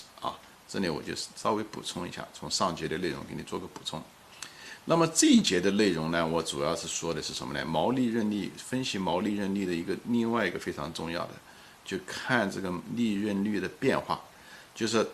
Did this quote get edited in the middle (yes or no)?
no